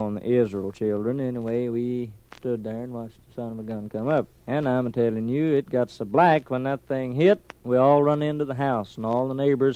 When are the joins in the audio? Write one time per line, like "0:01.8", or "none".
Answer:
none